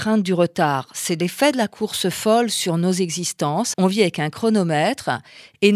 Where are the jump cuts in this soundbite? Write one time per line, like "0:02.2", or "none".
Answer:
0:03.7